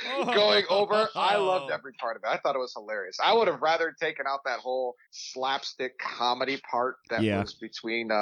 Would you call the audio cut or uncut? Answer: cut